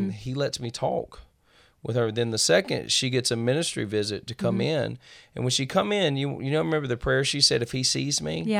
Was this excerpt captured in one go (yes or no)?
yes